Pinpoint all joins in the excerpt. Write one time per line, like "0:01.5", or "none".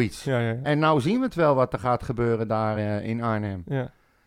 none